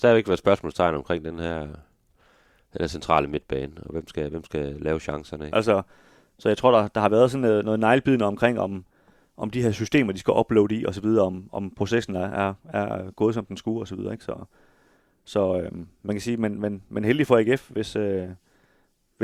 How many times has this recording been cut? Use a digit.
1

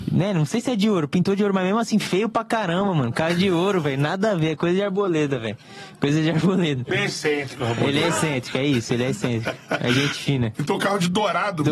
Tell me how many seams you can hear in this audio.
0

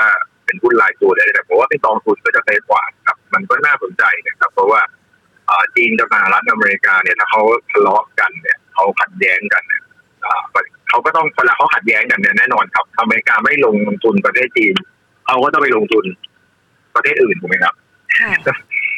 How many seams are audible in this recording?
1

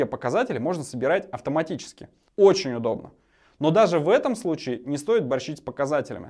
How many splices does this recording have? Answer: 1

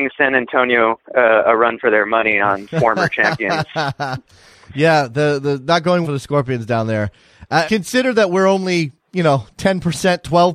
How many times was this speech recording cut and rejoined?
2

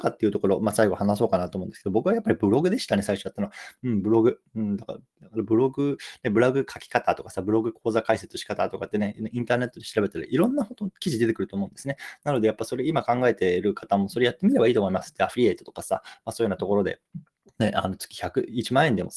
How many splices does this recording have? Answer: 0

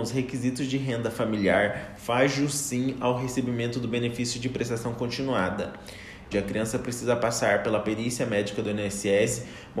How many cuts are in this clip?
1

